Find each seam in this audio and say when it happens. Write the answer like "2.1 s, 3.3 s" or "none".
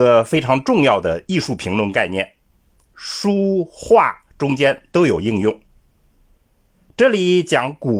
2.9 s